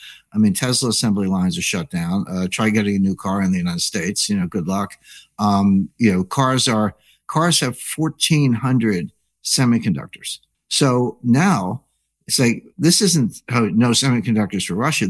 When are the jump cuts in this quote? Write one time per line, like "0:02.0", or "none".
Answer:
0:10.5